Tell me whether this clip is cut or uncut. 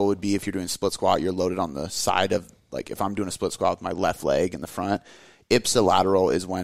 uncut